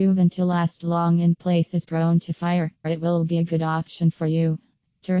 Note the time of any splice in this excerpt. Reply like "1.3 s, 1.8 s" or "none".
2.8 s